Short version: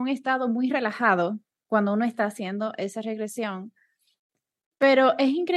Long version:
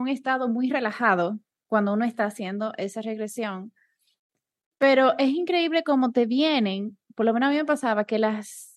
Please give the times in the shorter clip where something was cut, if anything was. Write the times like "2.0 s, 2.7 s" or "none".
none